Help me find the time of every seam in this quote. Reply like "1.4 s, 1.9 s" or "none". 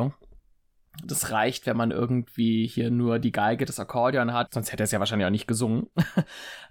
1.0 s, 4.5 s